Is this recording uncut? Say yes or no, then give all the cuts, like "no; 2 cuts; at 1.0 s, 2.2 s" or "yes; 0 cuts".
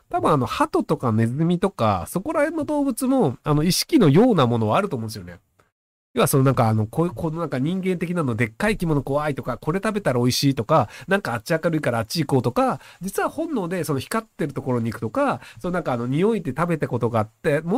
yes; 0 cuts